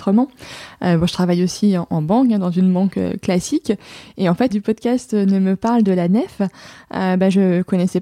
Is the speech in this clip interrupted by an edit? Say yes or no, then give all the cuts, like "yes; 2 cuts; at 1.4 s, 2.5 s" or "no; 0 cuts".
yes; 1 cut; at 4.5 s